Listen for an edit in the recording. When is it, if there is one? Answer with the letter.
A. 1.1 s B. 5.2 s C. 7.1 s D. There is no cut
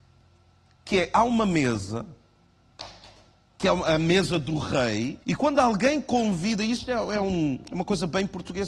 B